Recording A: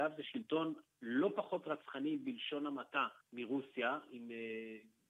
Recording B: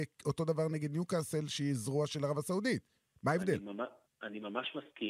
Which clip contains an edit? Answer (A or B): A